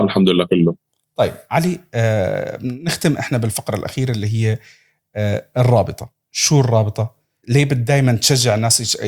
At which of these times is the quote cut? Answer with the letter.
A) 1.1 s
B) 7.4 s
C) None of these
B